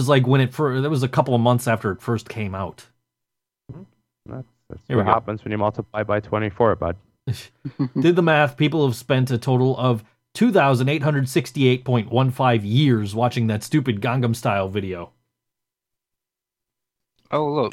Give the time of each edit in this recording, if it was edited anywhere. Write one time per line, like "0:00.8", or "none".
none

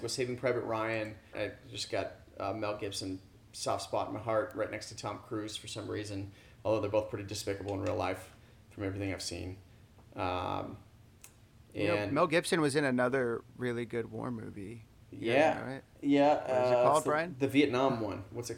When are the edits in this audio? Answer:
0:01.3

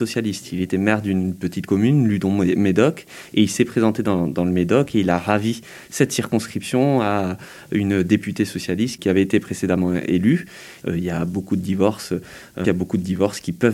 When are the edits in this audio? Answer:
0:10.8
0:12.6

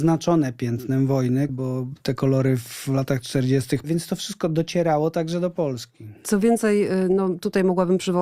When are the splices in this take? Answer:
0:01.5
0:03.8

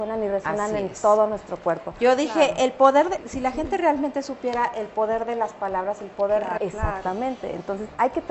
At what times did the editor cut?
0:03.2
0:06.6

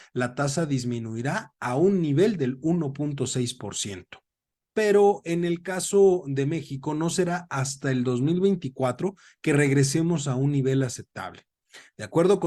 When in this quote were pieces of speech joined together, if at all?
0:04.6

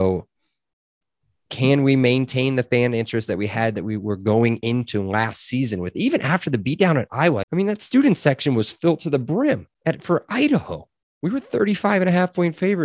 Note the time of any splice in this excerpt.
0:07.4
0:09.7

